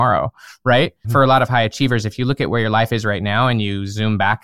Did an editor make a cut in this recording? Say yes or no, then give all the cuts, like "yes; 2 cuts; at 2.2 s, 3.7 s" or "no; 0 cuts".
yes; 1 cut; at 1.0 s